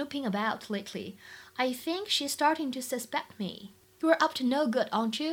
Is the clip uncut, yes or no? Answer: no